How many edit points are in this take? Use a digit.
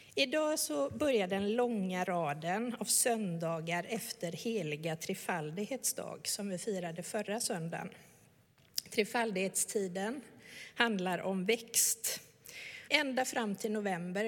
1